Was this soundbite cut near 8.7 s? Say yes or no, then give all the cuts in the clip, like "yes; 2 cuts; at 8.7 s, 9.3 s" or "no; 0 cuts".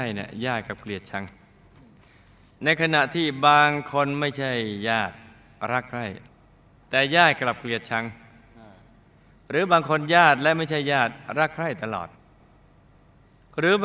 no; 0 cuts